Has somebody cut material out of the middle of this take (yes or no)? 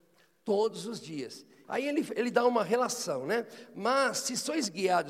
yes